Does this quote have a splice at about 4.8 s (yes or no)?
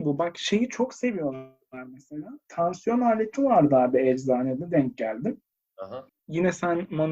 no